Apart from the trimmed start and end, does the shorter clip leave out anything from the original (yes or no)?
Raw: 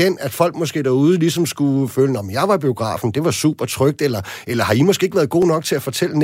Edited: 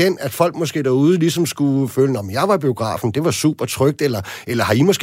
no